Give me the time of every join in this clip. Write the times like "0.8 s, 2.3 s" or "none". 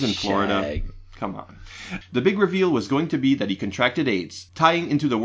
2.0 s